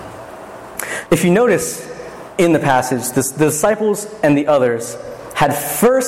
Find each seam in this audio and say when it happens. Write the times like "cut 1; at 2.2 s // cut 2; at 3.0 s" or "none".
cut 1; at 1.1 s

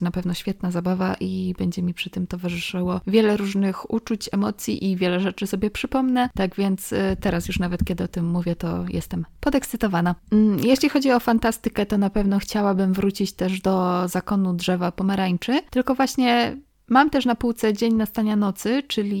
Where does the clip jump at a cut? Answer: none

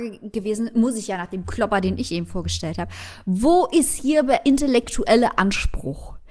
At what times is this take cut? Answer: none

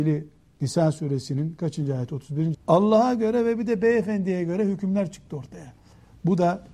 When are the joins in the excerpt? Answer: cut 1; at 2.5 s

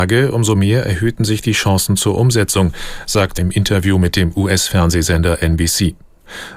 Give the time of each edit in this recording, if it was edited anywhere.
cut 1; at 3.4 s

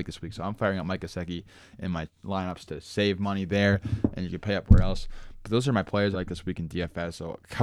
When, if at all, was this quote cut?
cut 1; at 6.1 s

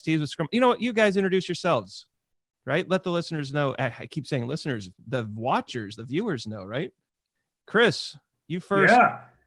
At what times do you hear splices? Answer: none

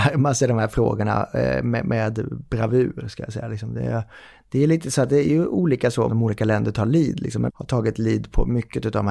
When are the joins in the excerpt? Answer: cut 1; at 6.1 s // cut 2; at 7.5 s

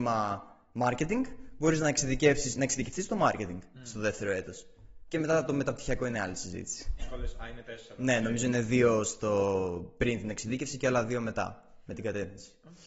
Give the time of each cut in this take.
cut 1; at 7.0 s

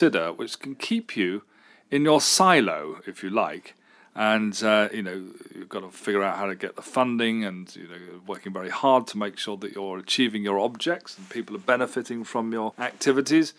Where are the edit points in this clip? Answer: none

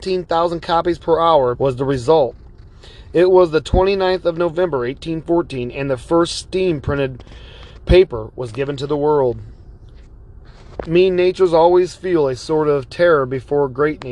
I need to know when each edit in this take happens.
cut 1; at 1.5 s

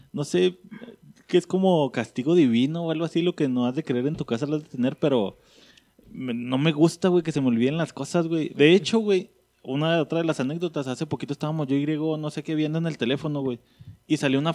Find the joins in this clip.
none

